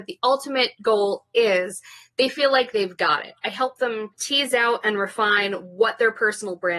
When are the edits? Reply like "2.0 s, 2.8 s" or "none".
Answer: 4.1 s